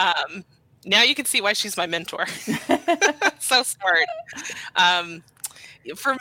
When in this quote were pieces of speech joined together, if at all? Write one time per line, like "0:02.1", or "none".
none